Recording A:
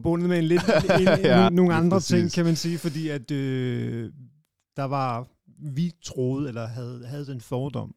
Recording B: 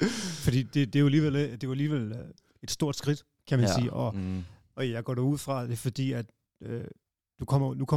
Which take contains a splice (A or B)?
A